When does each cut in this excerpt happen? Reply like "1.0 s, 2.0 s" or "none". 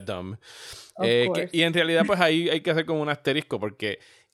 none